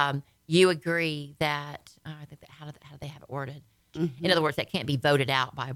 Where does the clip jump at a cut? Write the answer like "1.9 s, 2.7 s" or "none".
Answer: 3.9 s